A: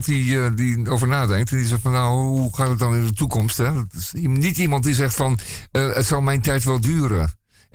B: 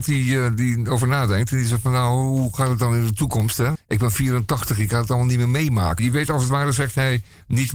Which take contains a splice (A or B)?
B